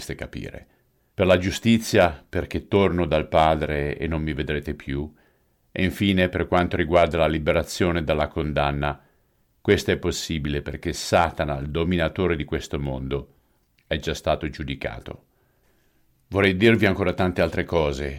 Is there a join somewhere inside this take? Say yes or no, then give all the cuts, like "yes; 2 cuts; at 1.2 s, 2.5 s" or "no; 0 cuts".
yes; 1 cut; at 1.1 s